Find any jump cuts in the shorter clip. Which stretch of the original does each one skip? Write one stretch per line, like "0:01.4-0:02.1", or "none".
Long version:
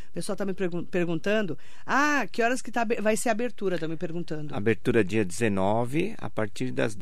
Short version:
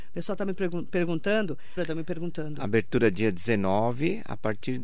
0:01.8-0:03.7

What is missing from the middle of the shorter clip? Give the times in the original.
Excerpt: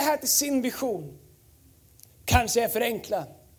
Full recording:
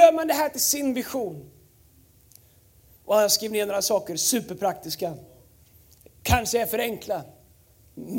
0:02.4-0:06.1

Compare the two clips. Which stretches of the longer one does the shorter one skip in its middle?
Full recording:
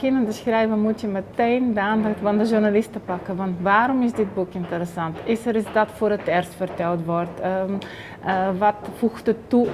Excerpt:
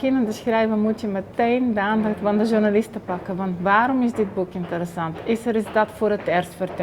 none

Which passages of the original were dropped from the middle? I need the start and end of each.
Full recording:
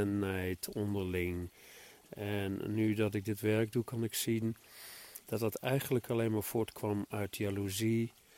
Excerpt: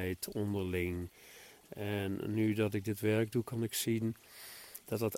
none

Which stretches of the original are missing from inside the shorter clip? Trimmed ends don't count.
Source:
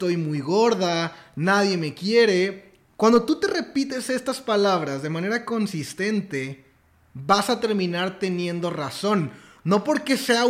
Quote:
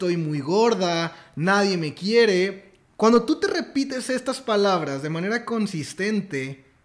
none

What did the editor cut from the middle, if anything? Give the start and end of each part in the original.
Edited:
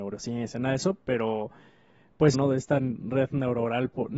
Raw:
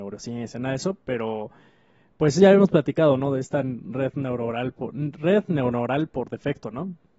0:02.3-0:03.2

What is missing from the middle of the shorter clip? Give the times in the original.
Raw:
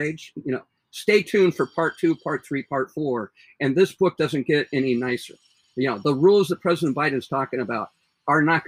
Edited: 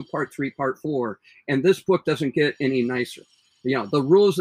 none

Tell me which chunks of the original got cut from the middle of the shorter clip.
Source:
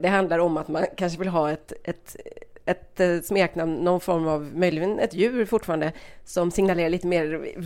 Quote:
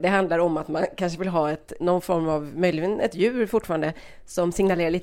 0:01.8-0:03.8

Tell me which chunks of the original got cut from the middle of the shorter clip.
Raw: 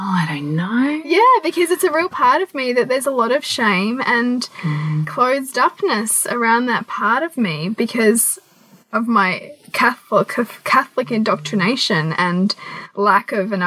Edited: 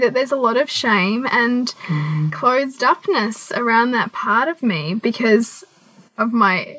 none

